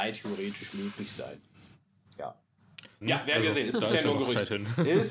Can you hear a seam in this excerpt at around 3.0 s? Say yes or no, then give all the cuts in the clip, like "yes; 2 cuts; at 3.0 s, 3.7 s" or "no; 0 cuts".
yes; 1 cut; at 3.0 s